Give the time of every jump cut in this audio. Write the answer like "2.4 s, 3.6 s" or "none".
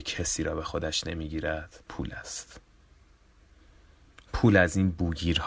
1.8 s